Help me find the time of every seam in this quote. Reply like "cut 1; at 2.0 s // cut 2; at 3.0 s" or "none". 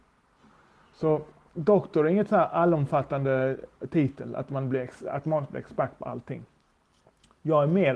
none